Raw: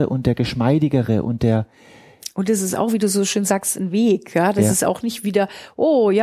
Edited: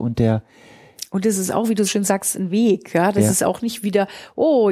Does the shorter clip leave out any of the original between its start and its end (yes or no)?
yes